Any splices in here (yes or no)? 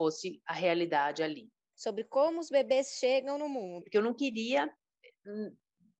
yes